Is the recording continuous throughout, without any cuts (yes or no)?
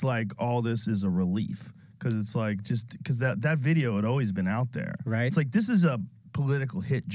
yes